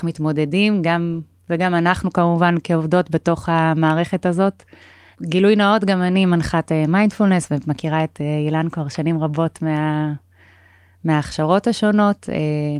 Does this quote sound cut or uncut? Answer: cut